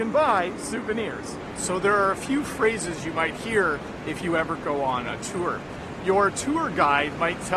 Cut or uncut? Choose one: uncut